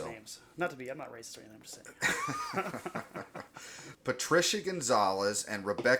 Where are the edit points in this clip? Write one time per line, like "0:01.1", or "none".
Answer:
0:03.9